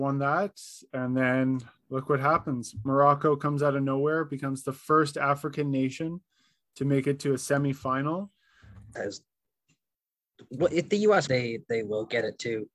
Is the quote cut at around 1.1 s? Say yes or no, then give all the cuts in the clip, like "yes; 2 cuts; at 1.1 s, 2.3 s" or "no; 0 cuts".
no; 2 cuts; at 9.0 s, 11.3 s